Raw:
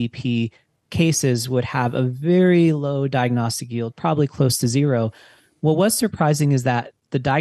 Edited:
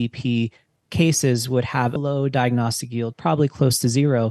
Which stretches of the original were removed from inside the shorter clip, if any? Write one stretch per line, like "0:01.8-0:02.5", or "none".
0:02.0-0:02.7